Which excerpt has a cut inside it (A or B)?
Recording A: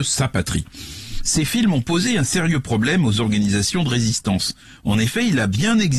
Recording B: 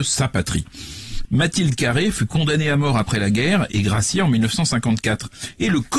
B